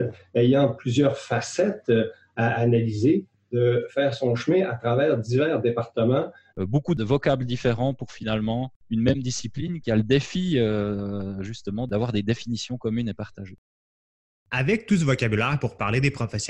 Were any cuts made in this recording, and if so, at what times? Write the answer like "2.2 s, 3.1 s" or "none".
6.5 s